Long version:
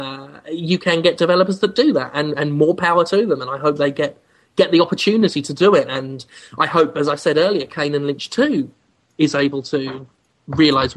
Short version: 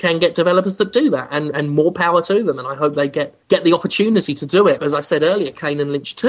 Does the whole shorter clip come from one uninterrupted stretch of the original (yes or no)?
no